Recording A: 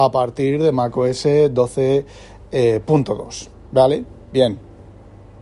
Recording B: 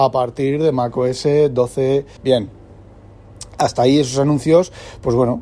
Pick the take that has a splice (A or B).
B